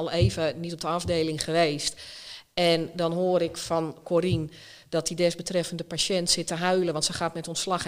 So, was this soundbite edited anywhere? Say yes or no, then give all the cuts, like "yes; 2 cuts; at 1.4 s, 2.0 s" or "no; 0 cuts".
no; 0 cuts